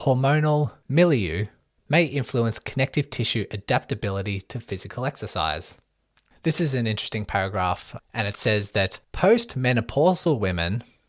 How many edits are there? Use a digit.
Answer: 2